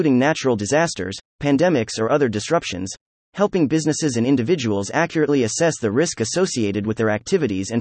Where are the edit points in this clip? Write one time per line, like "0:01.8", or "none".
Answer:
none